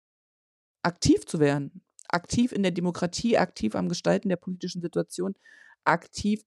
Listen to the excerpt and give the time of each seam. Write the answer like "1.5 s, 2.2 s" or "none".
none